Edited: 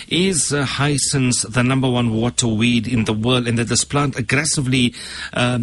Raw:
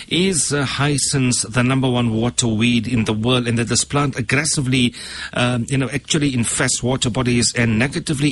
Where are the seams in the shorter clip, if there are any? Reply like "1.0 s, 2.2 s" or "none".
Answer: none